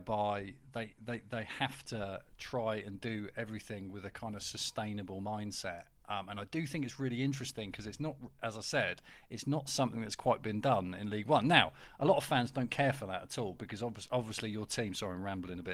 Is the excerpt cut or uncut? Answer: uncut